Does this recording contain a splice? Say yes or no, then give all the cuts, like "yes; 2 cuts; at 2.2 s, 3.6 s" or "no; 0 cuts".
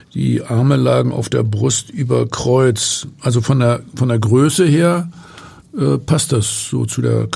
no; 0 cuts